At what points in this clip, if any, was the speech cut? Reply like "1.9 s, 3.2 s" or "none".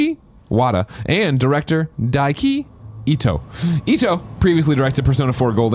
1.9 s